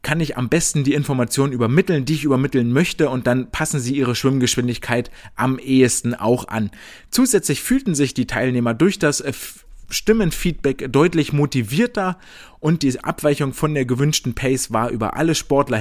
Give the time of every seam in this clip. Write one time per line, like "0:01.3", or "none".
none